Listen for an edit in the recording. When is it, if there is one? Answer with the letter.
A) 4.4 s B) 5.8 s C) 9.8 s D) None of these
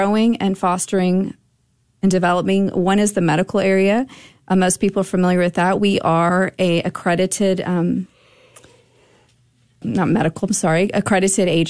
C